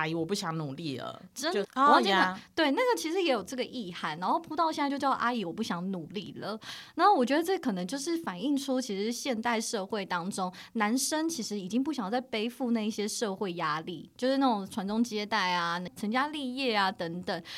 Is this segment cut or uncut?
cut